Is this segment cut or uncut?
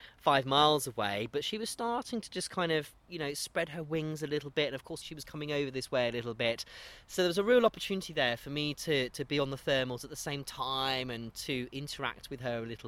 cut